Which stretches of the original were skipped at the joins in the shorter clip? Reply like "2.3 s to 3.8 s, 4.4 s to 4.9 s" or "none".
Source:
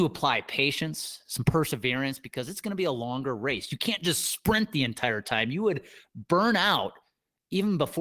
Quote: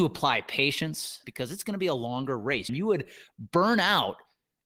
1.2 s to 2.2 s, 3.7 s to 5.5 s